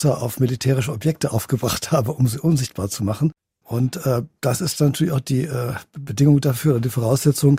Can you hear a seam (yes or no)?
yes